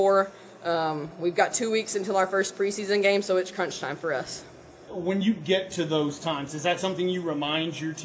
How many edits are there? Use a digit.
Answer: 1